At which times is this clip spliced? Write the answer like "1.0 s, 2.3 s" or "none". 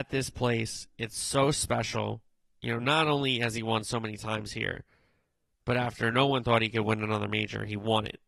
none